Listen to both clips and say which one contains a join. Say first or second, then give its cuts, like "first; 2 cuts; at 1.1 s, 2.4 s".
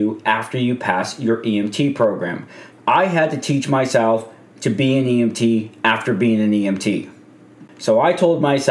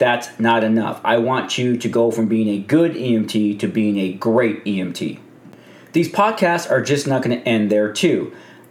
first; 1 cut; at 2.7 s